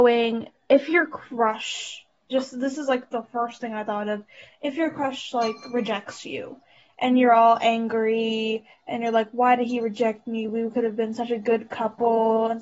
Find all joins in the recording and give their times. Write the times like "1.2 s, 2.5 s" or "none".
none